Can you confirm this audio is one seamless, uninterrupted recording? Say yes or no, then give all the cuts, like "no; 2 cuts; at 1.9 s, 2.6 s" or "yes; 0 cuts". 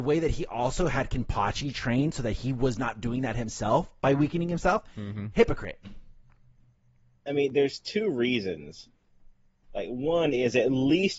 yes; 0 cuts